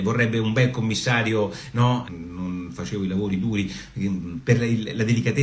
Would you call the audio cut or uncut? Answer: cut